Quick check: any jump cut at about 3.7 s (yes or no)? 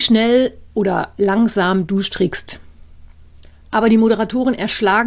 yes